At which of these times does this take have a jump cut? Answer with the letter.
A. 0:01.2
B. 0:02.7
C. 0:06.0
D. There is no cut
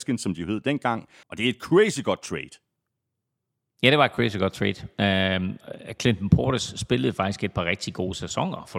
A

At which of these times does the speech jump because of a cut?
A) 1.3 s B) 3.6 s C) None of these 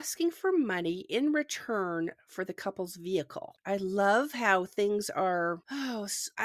B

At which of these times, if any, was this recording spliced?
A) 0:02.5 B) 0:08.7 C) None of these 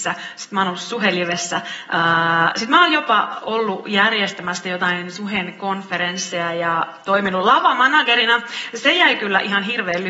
C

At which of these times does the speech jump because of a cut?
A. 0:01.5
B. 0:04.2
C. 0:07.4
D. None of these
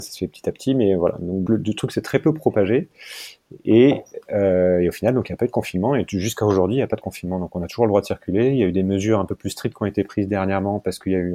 A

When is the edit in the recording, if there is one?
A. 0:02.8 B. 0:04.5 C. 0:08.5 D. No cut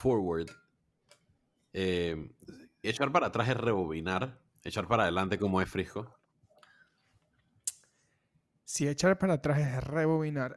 A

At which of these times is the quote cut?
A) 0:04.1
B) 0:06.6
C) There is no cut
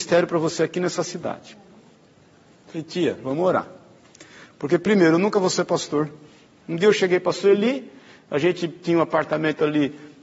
B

